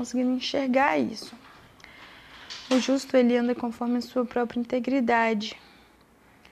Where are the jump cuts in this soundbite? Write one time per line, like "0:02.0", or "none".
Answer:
none